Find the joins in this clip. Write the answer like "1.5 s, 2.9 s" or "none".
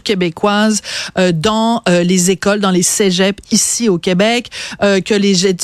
none